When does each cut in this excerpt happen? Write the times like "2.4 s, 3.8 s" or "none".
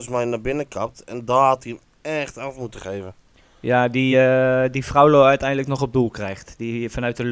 none